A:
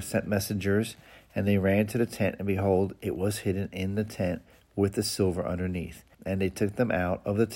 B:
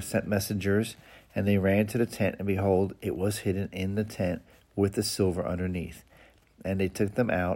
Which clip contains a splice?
A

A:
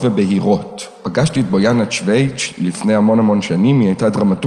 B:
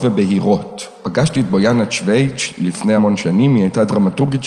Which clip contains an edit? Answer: B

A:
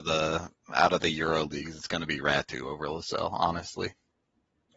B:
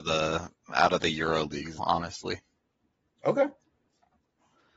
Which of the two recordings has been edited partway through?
B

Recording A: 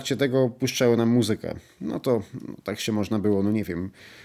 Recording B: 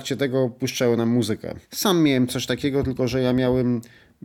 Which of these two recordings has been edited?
B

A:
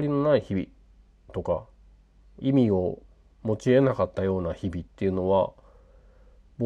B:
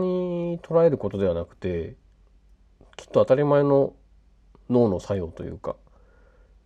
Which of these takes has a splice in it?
A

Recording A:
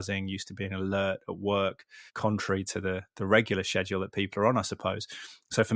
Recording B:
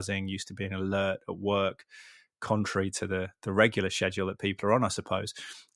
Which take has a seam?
A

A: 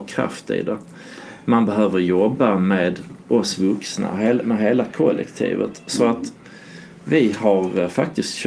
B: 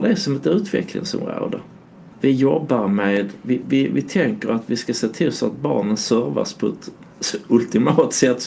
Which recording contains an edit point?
B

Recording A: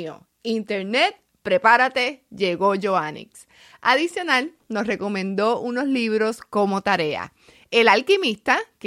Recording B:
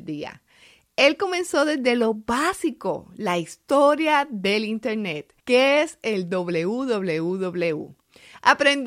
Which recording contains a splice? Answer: B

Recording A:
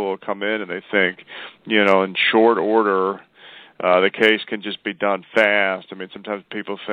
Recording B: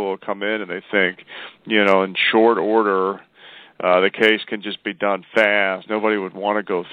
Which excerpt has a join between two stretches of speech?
B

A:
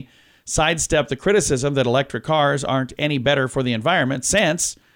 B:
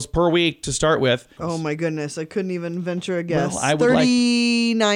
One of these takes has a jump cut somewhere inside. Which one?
B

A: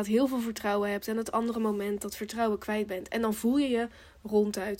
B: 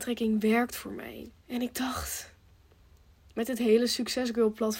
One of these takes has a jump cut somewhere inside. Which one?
B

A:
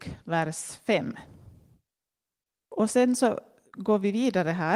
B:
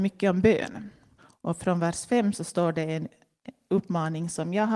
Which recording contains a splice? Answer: B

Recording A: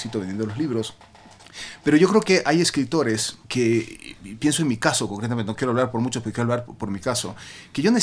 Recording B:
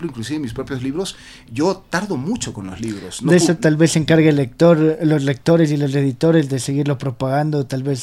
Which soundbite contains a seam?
A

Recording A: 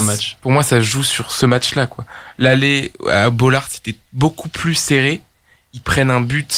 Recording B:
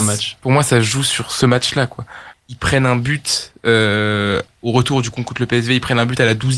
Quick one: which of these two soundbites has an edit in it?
B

